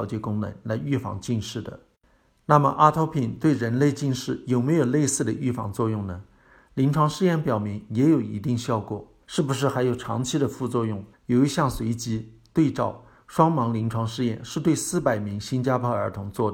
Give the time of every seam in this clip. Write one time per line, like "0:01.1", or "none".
0:09.2
0:11.1